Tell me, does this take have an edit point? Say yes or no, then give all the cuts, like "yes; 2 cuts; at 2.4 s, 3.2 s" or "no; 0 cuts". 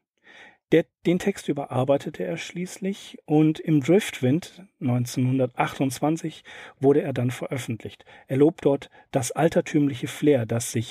no; 0 cuts